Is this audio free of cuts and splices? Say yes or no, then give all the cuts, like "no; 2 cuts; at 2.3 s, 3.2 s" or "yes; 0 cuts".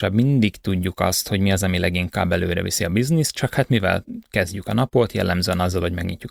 yes; 0 cuts